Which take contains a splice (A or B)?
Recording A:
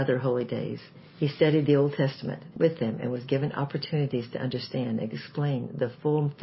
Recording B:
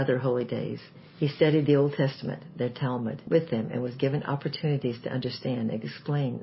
A